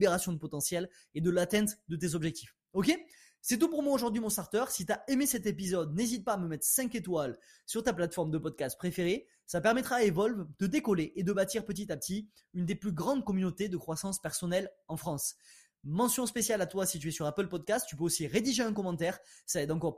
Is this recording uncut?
yes; 0 cuts

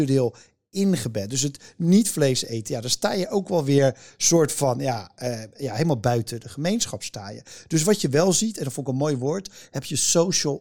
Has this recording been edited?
no; 0 cuts

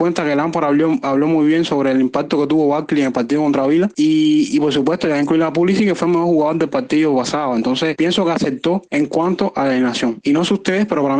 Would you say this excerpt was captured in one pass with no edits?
yes; 0 cuts

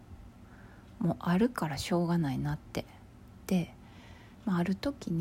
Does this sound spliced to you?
yes; 1 cut; at 3.5 s

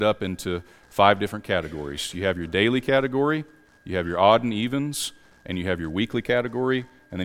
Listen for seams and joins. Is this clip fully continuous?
yes; 0 cuts

